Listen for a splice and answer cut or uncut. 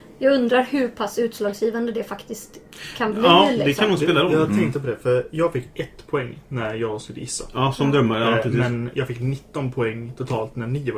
uncut